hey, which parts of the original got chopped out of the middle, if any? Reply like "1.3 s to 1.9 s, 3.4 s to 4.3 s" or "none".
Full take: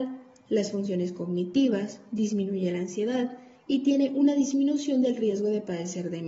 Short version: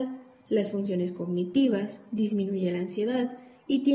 none